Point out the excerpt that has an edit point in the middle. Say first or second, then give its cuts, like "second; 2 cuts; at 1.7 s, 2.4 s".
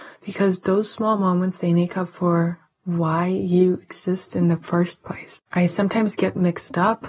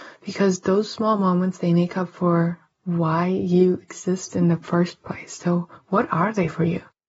first; 1 cut; at 5.4 s